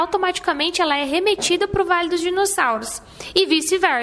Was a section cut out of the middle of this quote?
no; 0 cuts

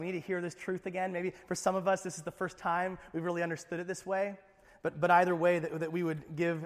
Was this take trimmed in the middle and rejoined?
no; 0 cuts

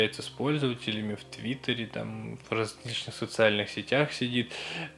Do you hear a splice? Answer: yes; 1 cut; at 2.4 s

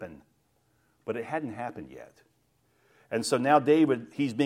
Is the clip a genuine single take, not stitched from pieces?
yes; 0 cuts

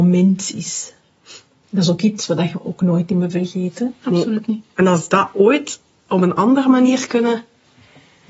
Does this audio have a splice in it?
no; 0 cuts

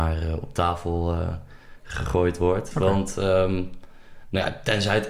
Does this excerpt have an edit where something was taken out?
yes; 1 cut; at 2.7 s

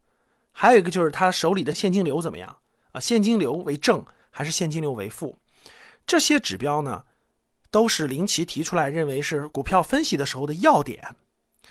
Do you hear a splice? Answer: no; 0 cuts

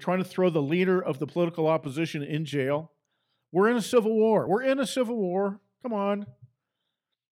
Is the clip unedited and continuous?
yes; 0 cuts

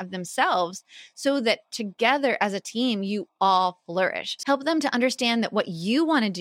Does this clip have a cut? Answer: yes; 1 cut; at 4.4 s

